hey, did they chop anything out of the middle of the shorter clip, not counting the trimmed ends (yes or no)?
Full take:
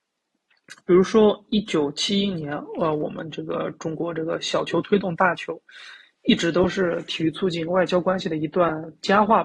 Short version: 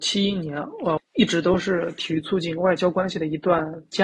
yes